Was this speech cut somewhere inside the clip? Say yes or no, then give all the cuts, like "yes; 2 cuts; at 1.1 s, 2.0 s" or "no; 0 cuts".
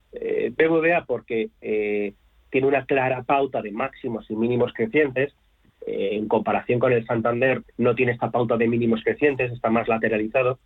yes; 1 cut; at 7.6 s